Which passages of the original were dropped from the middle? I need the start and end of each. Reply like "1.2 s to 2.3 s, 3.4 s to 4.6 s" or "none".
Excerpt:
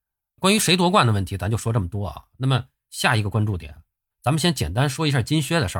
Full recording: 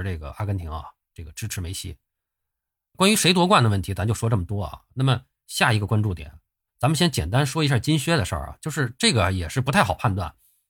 none